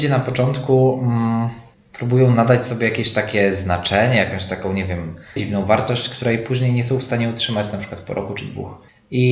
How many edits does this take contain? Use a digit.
1